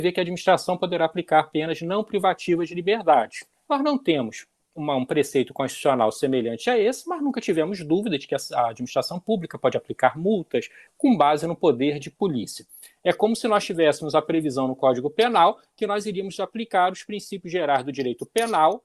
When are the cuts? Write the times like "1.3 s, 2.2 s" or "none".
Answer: 10.9 s, 13.0 s